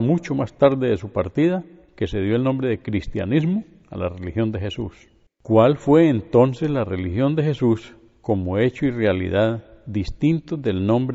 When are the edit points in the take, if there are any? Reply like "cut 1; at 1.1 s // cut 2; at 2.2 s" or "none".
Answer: cut 1; at 5.3 s

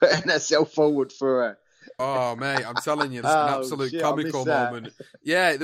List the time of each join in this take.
cut 1; at 2.0 s // cut 2; at 3.2 s

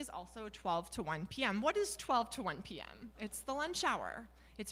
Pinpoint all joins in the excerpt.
cut 1; at 3.1 s

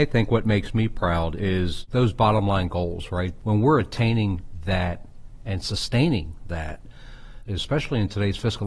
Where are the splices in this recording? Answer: cut 1; at 3.4 s // cut 2; at 7.5 s

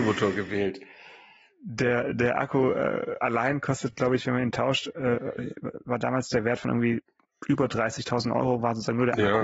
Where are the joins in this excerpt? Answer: none

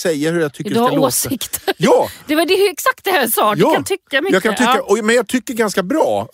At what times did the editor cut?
none

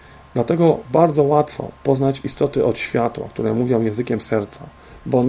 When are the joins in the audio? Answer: none

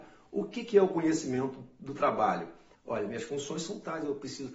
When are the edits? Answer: cut 1; at 2.7 s

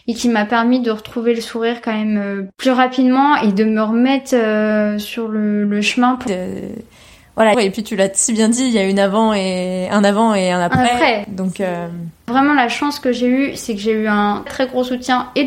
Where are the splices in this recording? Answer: cut 1; at 6.3 s // cut 2; at 7.5 s // cut 3; at 14.5 s

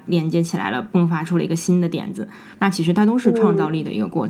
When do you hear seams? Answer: none

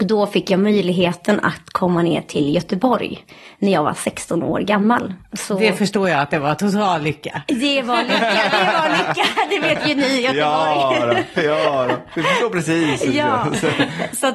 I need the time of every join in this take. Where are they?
none

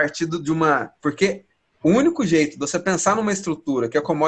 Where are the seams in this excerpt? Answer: cut 1; at 1.0 s

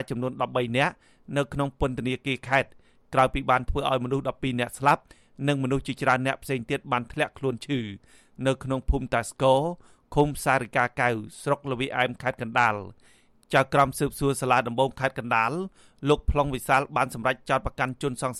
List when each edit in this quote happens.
none

